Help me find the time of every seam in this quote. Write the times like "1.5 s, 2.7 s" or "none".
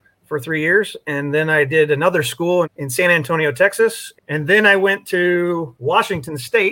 2.6 s, 4.2 s